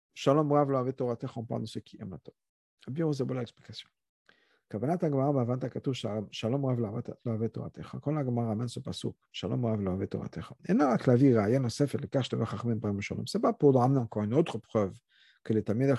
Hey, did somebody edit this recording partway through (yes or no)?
no